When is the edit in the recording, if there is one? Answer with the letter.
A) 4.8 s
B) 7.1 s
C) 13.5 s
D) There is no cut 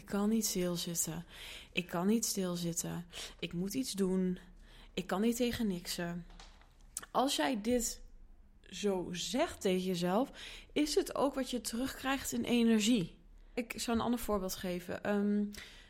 C